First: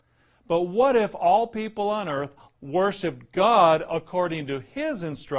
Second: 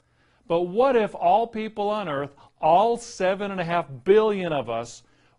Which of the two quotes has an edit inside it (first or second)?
first